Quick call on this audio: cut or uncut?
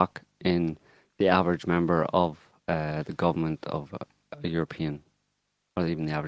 uncut